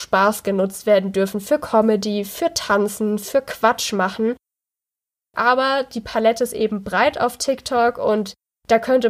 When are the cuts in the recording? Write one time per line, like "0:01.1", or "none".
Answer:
0:05.3